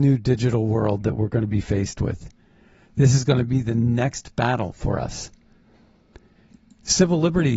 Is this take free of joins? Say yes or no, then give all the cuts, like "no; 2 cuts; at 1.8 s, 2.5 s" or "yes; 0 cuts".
yes; 0 cuts